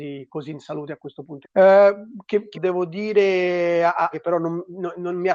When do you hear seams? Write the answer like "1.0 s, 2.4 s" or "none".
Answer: 1.4 s, 2.5 s, 4.1 s